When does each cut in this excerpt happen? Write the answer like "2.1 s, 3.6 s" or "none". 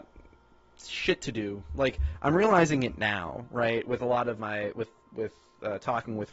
4.4 s